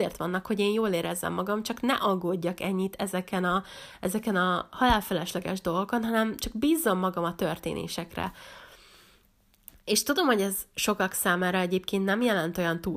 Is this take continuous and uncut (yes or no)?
yes